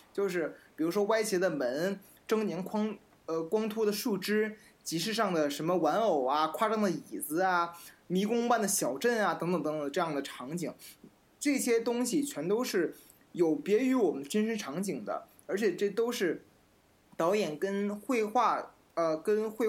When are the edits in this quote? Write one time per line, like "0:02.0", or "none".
none